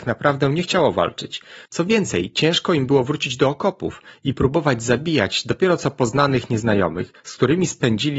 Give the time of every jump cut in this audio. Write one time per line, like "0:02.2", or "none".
0:01.7